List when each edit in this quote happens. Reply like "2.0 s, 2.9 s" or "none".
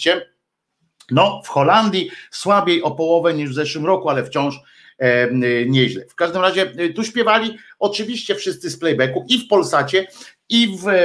none

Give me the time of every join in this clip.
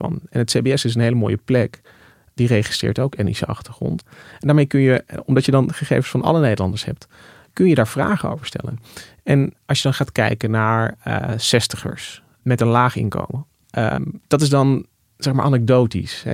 9.6 s, 13.6 s

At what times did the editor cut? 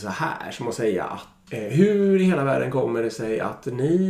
1.5 s

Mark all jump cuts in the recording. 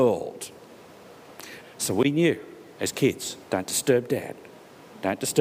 1.6 s, 3.4 s

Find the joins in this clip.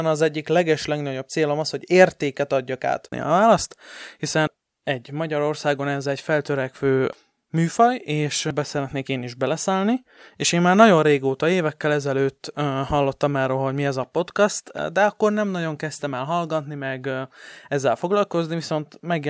3.1 s

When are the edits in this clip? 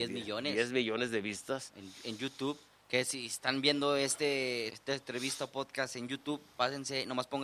4.7 s

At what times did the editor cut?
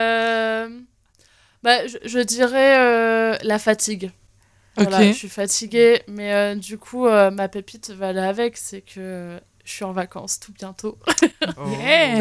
none

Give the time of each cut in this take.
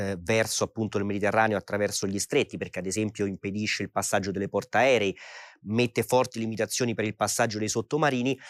none

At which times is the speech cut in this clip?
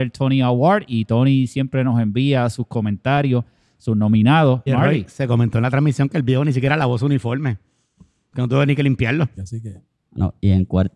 4.7 s, 9.4 s

